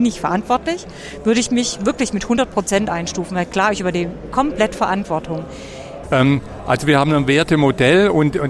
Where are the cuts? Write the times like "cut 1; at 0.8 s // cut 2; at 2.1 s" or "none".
cut 1; at 6.0 s